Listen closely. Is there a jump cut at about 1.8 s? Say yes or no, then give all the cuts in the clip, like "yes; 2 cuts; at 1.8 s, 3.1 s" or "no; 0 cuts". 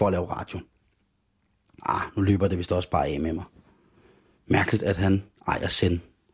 yes; 2 cuts; at 1.8 s, 4.4 s